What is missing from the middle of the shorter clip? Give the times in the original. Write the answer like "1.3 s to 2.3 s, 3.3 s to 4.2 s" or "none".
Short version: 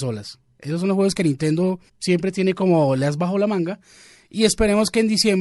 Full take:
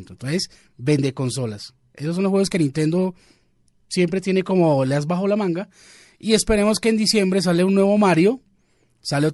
3.2 s to 3.8 s